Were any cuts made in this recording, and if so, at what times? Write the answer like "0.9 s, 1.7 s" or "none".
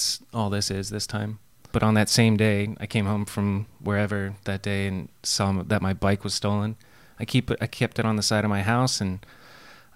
1.7 s